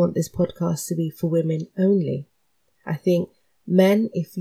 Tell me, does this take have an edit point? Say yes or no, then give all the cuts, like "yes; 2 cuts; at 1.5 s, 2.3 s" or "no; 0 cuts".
no; 0 cuts